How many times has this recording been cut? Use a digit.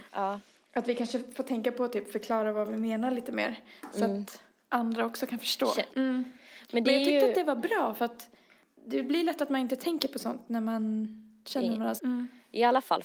2